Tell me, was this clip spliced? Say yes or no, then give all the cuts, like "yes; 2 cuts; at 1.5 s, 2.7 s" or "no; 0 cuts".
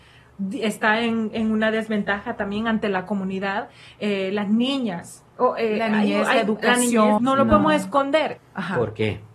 yes; 2 cuts; at 7.2 s, 8.4 s